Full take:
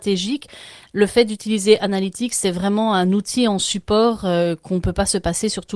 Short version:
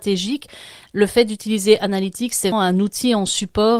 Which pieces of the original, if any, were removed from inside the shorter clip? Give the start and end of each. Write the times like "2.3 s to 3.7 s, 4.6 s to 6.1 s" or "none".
2.5 s to 2.8 s